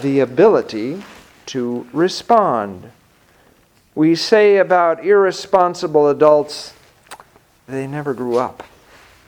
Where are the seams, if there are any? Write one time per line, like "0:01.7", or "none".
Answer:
0:07.7